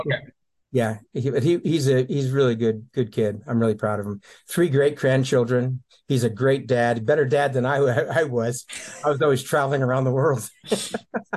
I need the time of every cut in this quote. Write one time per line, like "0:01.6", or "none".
none